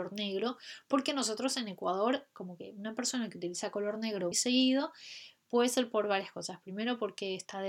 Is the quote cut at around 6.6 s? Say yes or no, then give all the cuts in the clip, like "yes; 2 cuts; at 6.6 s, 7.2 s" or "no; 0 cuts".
no; 1 cut; at 4.3 s